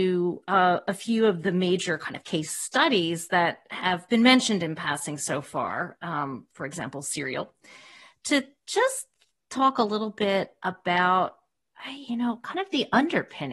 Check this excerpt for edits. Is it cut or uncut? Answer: uncut